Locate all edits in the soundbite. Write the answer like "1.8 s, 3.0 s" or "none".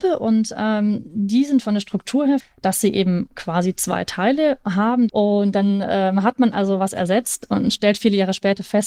2.4 s, 5.1 s